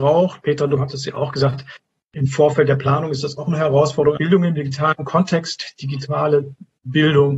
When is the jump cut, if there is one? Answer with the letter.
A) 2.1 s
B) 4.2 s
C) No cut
B